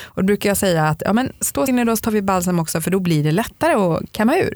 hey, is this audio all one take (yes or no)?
no